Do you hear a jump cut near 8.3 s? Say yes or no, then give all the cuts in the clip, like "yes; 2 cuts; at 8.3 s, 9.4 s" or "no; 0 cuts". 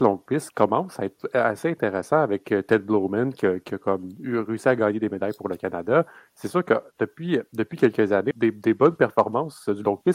yes; 1 cut; at 8.3 s